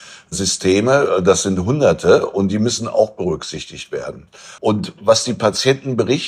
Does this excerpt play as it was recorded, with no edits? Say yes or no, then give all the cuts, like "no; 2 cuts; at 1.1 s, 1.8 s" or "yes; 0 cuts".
no; 1 cut; at 4.6 s